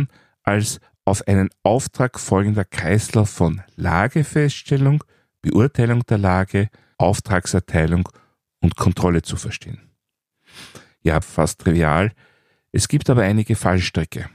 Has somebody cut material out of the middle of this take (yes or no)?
yes